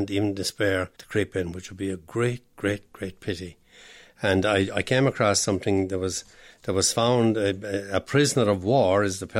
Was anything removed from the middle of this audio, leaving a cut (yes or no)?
yes